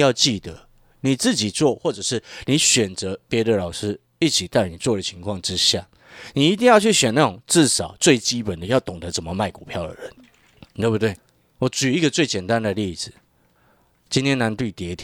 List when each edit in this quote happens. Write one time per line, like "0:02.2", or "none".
none